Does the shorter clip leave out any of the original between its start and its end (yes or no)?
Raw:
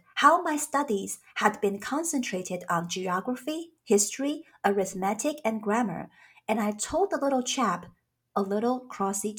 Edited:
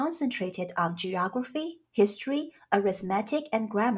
no